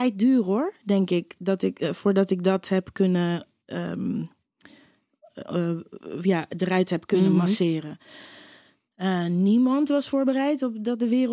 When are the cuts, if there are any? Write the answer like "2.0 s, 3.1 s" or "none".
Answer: none

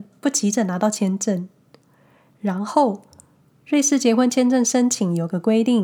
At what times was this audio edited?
3.6 s

